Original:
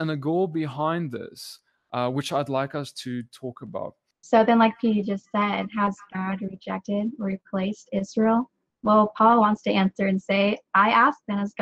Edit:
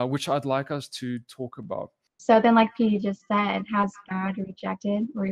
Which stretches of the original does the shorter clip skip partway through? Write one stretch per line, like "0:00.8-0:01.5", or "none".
none